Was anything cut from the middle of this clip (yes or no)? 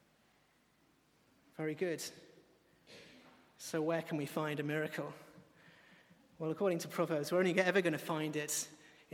no